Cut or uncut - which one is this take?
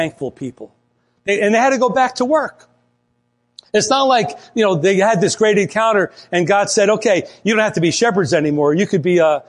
uncut